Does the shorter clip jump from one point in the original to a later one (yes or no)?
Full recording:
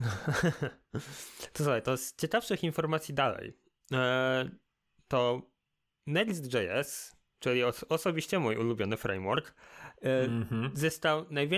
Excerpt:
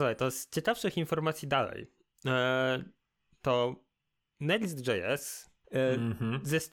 yes